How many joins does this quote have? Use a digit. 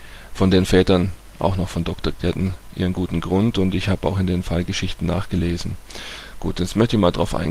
1